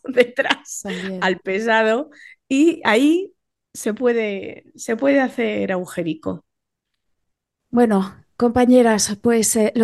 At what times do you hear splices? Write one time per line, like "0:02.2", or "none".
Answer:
none